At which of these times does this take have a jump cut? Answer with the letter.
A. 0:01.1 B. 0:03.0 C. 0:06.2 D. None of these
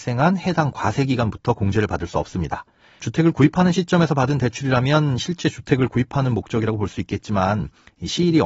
B